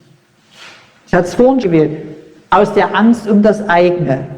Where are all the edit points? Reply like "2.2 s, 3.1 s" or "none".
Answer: 1.6 s

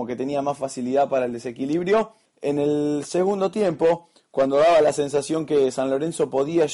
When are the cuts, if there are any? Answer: 2.3 s

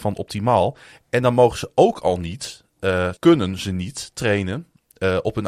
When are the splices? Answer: 3.2 s

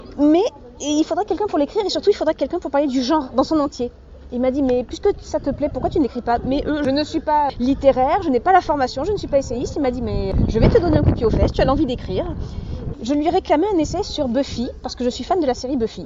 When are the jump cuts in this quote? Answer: 11.5 s, 12.9 s

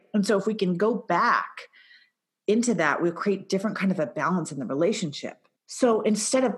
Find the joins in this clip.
5.5 s

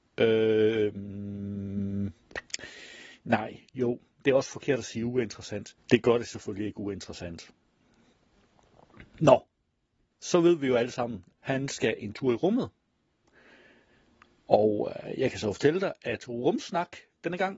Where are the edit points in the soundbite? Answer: 5.8 s, 10.1 s, 11.4 s

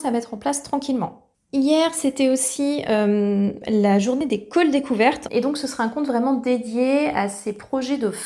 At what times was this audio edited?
5.3 s

